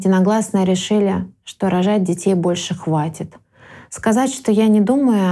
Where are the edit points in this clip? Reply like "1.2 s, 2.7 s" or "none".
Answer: none